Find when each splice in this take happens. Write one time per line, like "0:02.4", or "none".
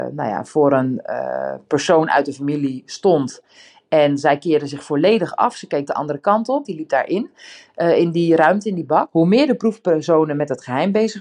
0:06.6
0:09.1